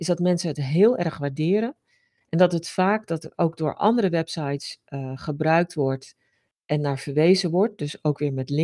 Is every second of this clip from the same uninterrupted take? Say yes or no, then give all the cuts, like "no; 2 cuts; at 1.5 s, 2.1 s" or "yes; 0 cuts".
yes; 0 cuts